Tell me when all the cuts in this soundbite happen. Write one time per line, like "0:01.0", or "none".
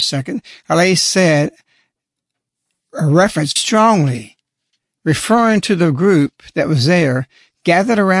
0:03.6

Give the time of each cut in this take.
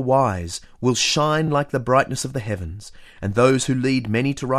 none

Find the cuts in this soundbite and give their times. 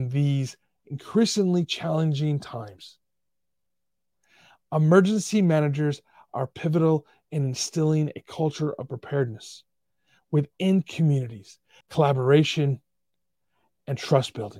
0:11.8

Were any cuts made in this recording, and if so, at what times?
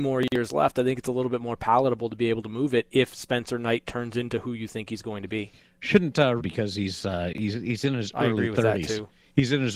0:06.4

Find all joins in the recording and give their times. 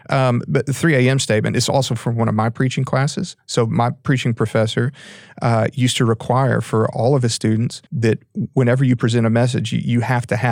0:07.9

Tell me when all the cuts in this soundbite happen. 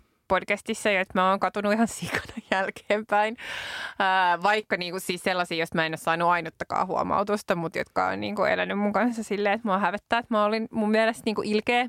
none

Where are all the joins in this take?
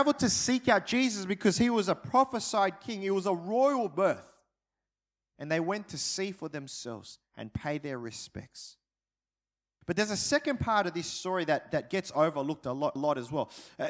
0:09.8
0:13.0

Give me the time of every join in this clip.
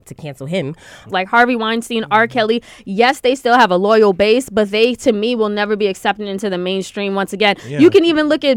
0:01.1

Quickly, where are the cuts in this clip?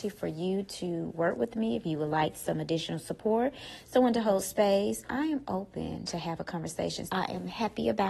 0:05.1
0:07.1

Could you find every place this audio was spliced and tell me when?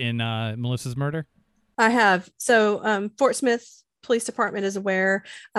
none

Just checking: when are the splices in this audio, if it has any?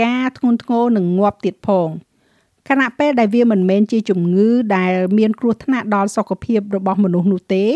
none

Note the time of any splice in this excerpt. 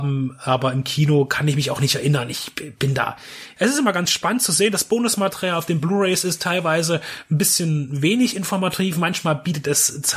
0:03.6

